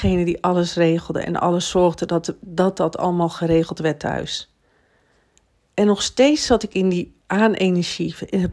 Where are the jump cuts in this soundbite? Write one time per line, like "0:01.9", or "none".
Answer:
0:07.2